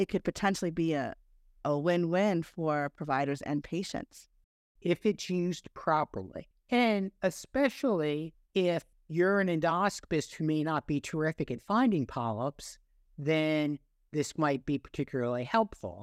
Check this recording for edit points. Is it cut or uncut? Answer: uncut